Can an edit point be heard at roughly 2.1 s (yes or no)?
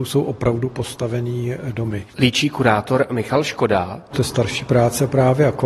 no